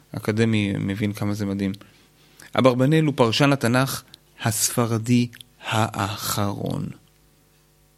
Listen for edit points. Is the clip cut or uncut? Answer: uncut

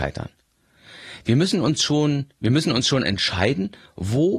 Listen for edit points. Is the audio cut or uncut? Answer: uncut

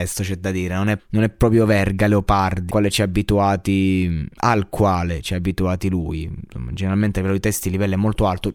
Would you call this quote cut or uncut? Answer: cut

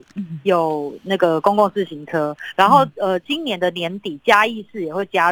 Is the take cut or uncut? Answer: uncut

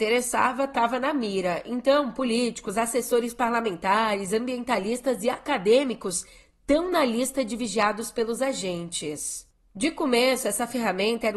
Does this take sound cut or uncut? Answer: uncut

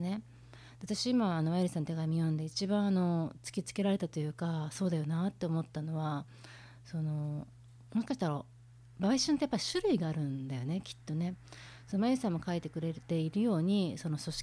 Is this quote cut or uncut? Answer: uncut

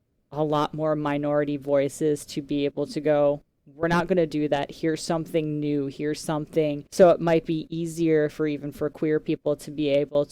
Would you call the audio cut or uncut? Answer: cut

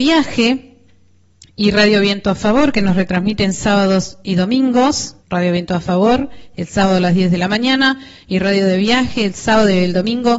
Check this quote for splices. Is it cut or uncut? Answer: cut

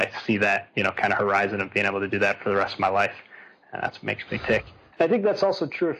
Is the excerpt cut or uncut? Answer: cut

